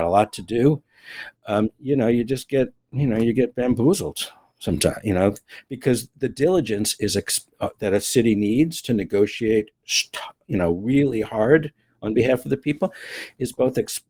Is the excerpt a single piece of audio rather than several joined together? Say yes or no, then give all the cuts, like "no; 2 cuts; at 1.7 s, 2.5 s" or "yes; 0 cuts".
yes; 0 cuts